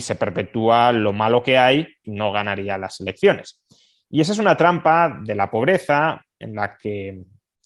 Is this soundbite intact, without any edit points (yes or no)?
no